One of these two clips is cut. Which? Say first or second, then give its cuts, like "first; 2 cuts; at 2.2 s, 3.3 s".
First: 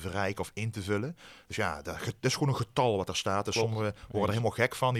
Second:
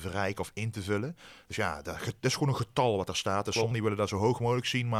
second; 1 cut; at 3.7 s